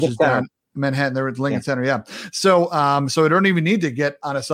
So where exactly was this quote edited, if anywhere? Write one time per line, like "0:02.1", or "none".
none